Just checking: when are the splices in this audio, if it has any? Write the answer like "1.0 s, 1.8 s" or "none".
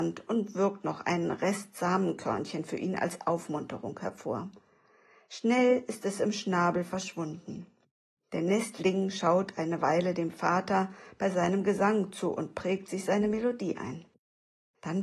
none